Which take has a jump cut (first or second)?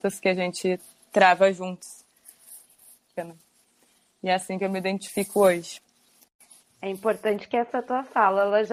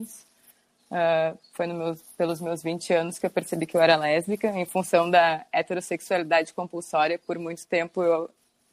first